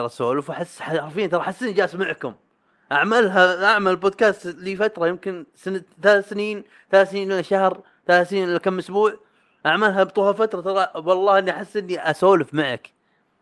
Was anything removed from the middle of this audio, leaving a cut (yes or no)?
no